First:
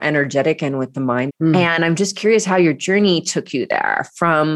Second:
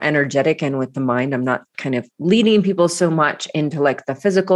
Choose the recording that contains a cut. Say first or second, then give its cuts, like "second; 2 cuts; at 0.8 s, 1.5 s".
first; 1 cut; at 1.3 s